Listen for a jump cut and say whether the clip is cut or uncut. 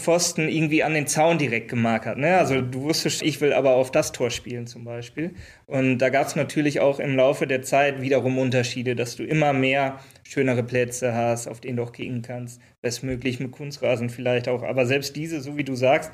cut